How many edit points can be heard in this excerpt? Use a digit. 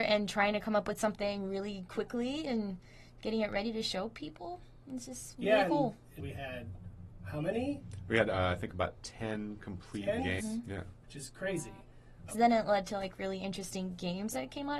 3